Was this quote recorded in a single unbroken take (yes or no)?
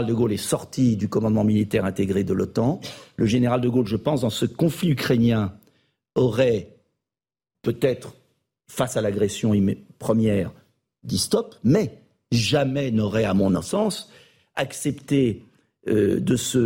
yes